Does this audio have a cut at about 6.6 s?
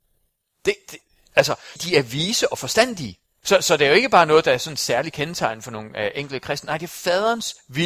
no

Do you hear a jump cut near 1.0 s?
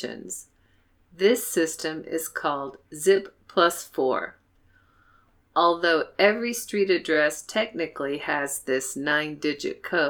no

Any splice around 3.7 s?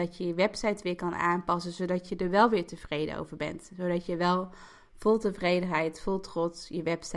no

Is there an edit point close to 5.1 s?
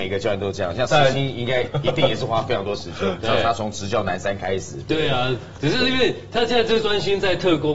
no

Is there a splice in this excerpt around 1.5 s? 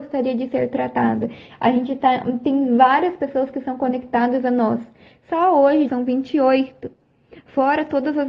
yes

